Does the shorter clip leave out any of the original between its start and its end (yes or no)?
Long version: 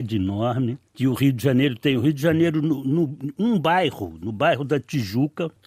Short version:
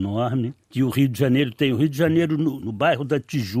yes